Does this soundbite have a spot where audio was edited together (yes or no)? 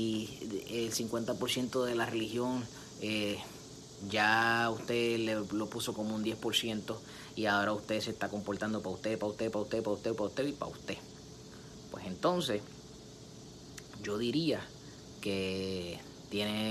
no